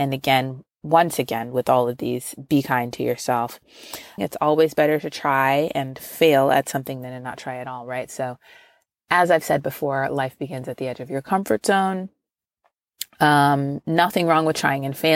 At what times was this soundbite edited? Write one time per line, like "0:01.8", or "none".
0:04.2